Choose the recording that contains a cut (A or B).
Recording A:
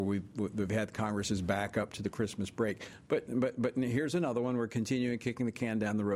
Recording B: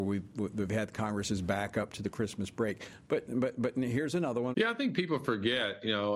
B